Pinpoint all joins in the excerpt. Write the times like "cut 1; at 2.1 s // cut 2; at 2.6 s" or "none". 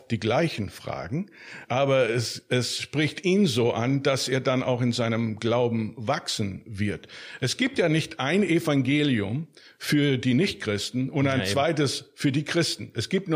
cut 1; at 1.7 s